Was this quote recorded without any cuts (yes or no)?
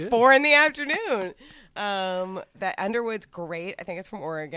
no